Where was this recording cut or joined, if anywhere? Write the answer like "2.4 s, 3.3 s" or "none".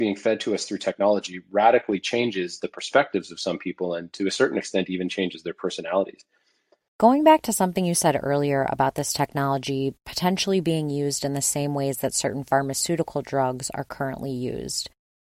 6.9 s

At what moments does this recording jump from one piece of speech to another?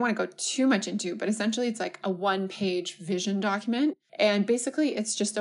4.1 s

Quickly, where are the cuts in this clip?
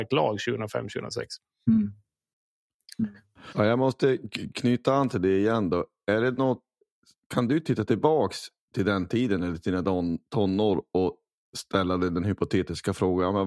3.5 s

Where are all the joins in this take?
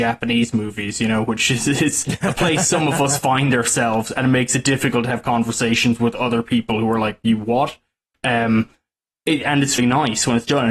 8.1 s, 9.8 s

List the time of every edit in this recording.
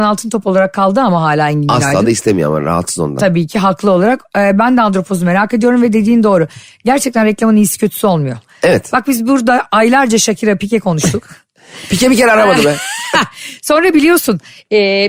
none

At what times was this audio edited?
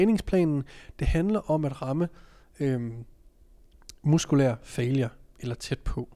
none

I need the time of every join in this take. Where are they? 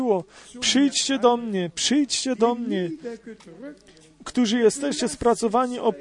none

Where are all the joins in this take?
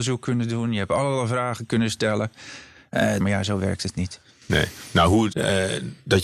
3.2 s, 5.3 s

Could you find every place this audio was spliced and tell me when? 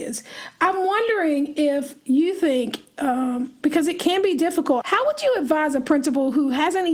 4.8 s

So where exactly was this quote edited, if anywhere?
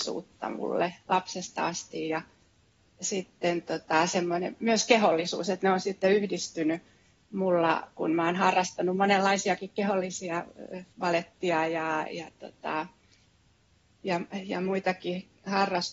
2.8 s, 10.9 s

